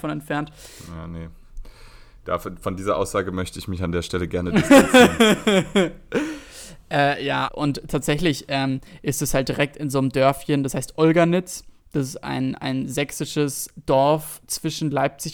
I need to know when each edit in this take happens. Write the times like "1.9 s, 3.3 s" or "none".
7.5 s